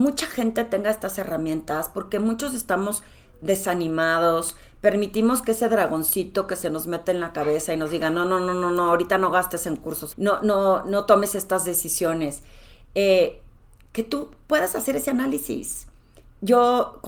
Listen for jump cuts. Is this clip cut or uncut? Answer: cut